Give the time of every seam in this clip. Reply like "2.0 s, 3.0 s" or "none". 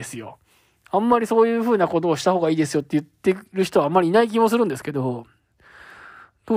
none

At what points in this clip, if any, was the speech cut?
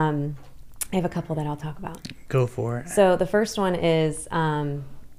none

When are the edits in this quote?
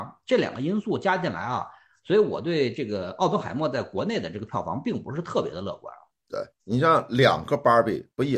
none

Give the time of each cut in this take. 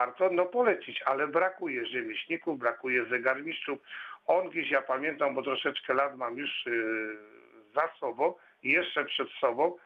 none

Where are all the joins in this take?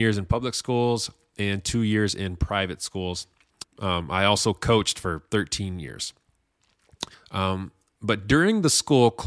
3.6 s, 7.1 s

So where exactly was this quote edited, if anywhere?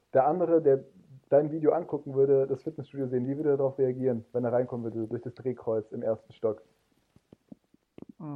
none

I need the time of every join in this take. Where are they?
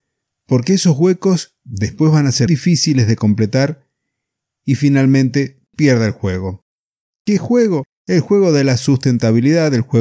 2.5 s

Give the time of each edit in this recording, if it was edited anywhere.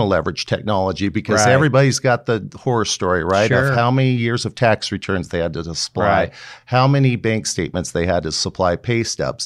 none

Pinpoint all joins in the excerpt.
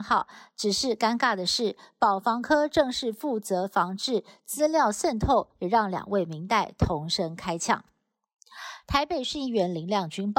5.6 s, 8.8 s

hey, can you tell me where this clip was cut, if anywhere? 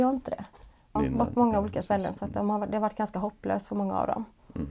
1.0 s

